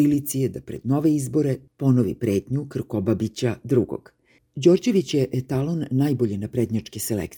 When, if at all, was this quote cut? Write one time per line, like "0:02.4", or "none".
0:04.4

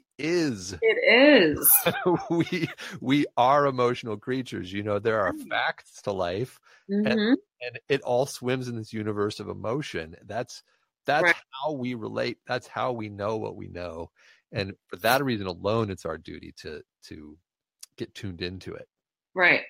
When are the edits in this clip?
none

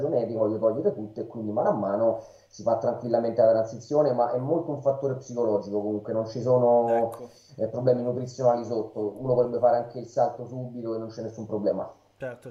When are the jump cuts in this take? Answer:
none

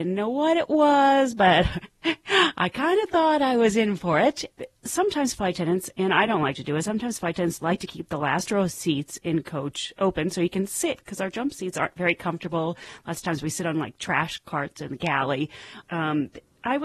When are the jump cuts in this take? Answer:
0:04.5
0:15.8

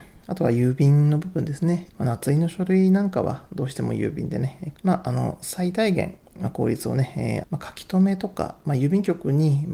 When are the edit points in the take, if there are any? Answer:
0:01.9
0:04.7
0:07.4

